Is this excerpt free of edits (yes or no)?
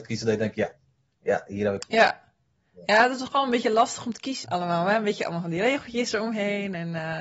no